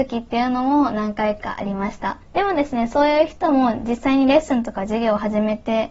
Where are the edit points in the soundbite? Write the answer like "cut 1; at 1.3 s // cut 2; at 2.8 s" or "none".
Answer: cut 1; at 2.2 s